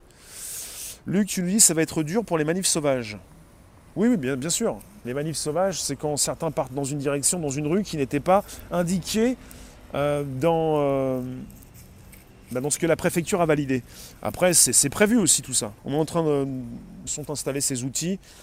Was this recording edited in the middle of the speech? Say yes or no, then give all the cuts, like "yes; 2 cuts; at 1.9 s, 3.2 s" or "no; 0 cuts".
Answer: yes; 2 cuts; at 15.8 s, 17.1 s